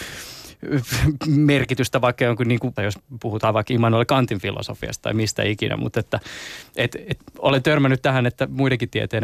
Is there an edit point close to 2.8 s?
yes; 1 cut; at 2.8 s

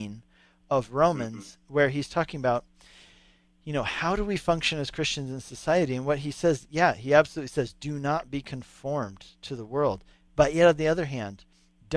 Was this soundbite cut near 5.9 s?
no; 0 cuts

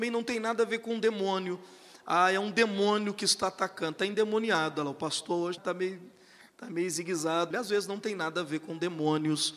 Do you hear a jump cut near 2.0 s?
no; 2 cuts; at 5.6 s, 7.5 s

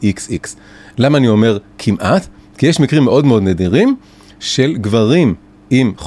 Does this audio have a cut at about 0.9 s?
no; 0 cuts

